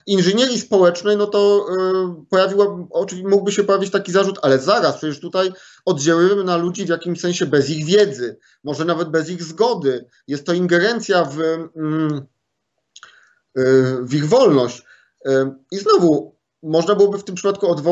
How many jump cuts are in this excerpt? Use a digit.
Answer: 0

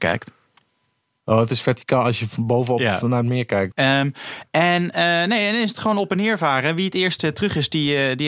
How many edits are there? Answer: 1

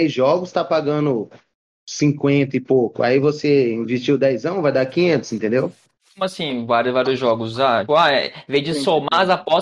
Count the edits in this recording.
1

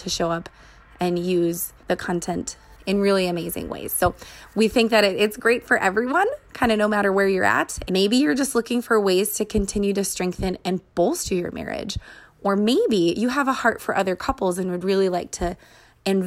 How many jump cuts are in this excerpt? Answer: 1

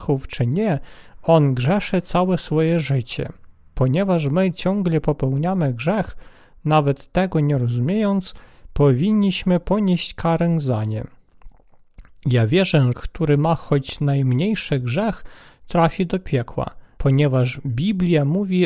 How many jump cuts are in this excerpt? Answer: 2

